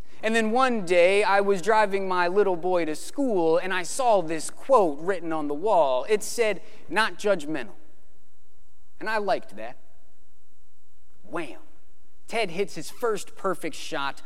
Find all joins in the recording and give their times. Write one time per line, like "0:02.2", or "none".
0:06.9